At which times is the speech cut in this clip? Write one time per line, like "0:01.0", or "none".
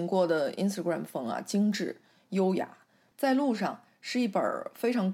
0:03.1